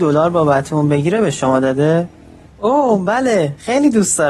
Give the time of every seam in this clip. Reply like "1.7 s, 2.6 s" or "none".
2.5 s